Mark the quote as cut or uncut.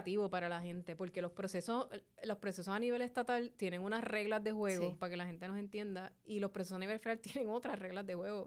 uncut